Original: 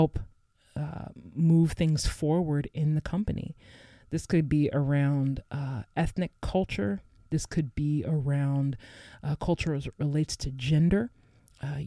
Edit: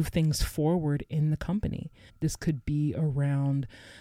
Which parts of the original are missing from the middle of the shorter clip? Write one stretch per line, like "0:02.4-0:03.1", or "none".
0:03.7-0:07.2